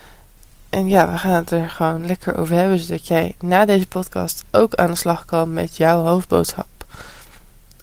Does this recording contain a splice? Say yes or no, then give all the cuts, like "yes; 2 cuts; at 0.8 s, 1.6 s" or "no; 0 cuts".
no; 0 cuts